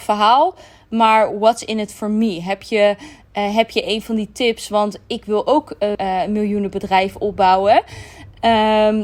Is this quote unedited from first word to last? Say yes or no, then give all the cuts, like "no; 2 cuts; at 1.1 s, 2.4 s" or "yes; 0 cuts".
no; 1 cut; at 6.0 s